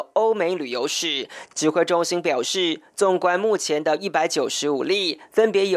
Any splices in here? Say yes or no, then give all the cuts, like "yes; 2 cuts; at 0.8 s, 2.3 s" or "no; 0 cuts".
no; 0 cuts